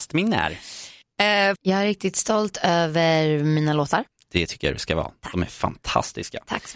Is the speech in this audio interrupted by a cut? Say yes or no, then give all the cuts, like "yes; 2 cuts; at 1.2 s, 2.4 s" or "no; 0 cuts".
yes; 1 cut; at 1.6 s